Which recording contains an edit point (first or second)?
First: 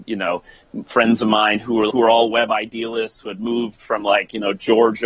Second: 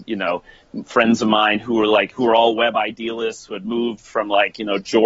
first